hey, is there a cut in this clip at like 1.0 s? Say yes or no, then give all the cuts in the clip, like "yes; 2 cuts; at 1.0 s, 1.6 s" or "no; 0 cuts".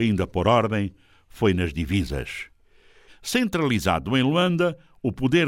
no; 1 cut; at 3.1 s